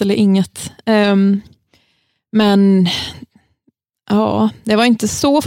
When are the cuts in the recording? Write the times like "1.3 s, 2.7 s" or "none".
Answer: none

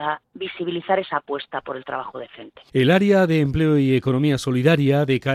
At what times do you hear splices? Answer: none

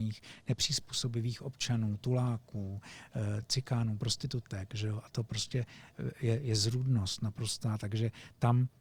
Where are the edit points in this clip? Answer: none

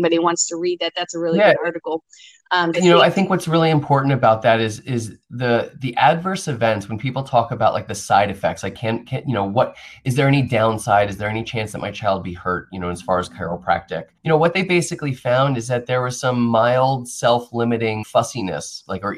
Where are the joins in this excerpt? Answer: 2.7 s, 14.2 s, 18.0 s

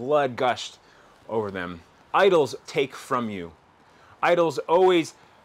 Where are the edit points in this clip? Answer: 2.7 s

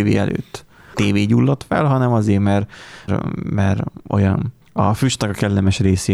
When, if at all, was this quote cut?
0.9 s, 3.1 s, 4.6 s

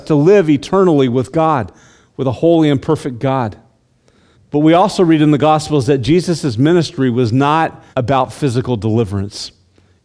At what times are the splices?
4.3 s, 7.9 s

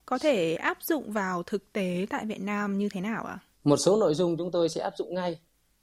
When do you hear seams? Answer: 3.5 s

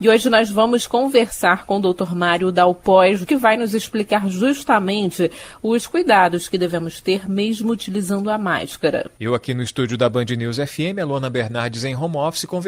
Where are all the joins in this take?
3.3 s

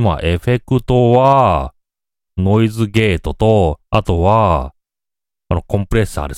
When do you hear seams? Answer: 2.3 s, 3.8 s

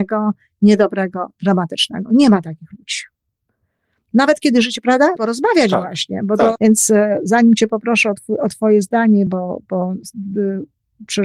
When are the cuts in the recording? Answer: 5.2 s, 6.6 s, 9.3 s

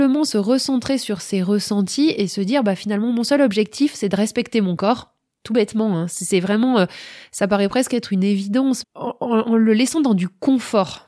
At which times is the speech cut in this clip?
8.8 s

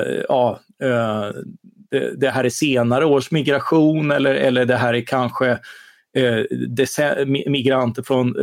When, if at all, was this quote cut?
none

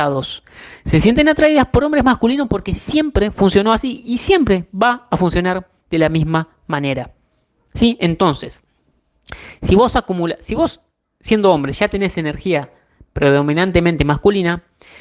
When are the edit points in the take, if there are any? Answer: none

